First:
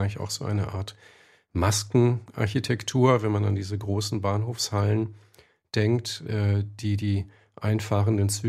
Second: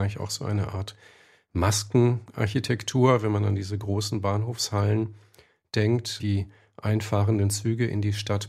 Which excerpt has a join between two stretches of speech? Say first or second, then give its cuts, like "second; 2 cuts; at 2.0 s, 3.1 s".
second; 1 cut; at 6.2 s